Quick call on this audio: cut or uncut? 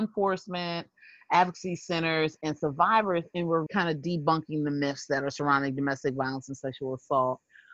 cut